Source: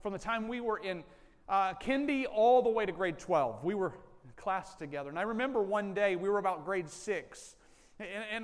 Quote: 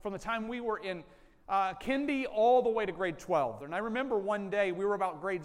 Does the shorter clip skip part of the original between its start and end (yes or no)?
yes